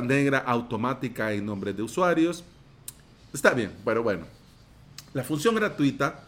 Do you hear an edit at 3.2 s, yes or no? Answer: yes